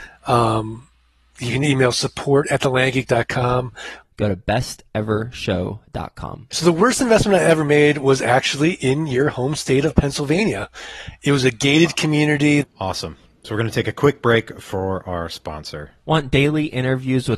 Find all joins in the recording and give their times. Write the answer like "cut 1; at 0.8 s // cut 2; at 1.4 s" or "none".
cut 1; at 4.0 s // cut 2; at 6.5 s // cut 3; at 12.6 s